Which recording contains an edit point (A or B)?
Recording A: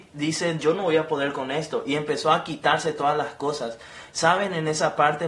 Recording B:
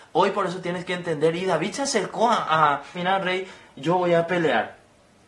B